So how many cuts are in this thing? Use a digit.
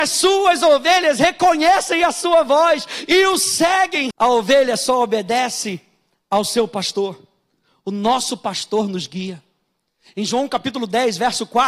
1